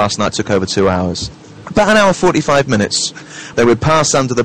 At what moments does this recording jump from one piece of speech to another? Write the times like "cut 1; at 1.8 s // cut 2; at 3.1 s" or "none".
cut 1; at 1.6 s // cut 2; at 3.5 s